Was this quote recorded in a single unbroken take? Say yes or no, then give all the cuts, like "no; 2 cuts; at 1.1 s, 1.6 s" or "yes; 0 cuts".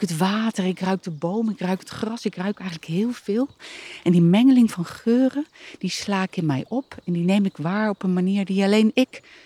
yes; 0 cuts